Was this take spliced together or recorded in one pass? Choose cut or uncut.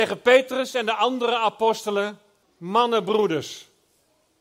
cut